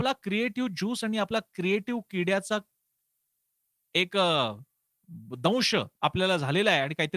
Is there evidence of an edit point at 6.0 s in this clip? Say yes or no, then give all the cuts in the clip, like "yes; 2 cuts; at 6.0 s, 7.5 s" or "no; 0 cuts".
yes; 1 cut; at 6.0 s